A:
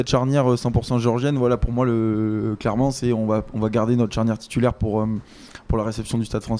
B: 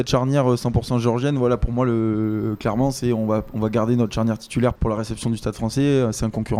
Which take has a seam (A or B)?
B